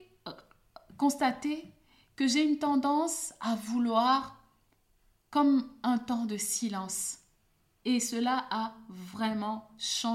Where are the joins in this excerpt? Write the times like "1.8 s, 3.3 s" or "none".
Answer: 7.8 s